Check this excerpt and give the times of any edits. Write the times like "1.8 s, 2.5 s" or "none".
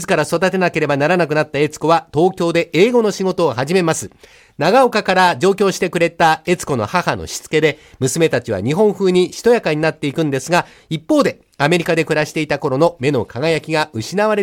none